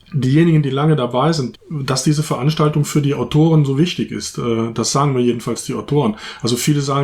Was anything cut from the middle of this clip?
yes; 1 cut; at 1.5 s

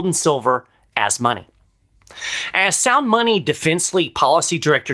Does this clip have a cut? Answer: no; 0 cuts

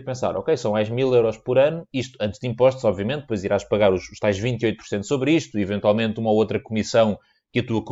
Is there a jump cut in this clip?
no; 0 cuts

